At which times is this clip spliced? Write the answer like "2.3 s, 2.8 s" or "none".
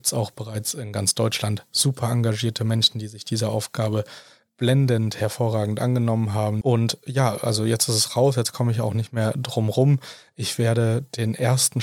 6.6 s